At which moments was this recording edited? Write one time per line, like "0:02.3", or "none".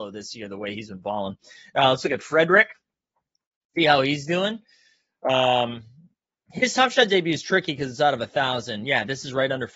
none